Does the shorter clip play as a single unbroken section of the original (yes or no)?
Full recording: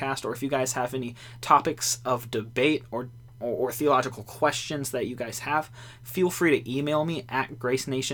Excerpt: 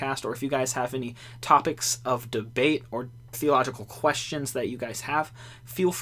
no